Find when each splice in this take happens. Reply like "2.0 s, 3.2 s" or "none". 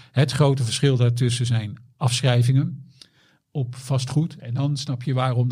4.4 s